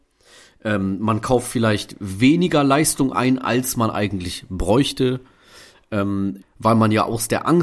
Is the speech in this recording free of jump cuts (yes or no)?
no